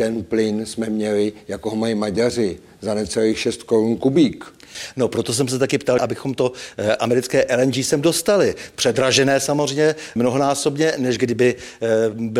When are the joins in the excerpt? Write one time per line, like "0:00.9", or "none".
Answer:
0:06.0
0:10.2